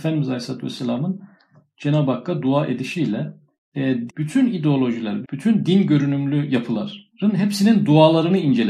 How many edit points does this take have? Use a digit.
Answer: 3